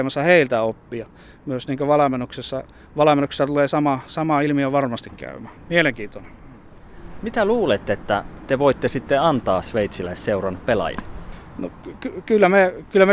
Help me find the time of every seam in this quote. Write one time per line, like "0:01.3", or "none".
none